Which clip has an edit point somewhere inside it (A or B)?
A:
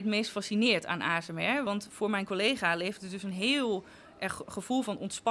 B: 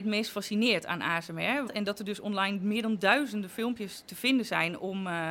B